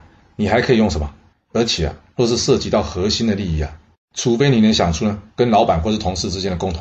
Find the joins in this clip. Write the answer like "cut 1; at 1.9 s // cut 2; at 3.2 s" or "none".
cut 1; at 1.3 s // cut 2; at 3.9 s